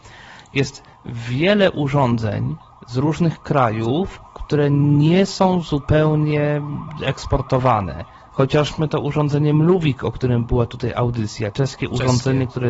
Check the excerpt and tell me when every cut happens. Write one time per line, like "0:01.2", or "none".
0:08.3
0:11.5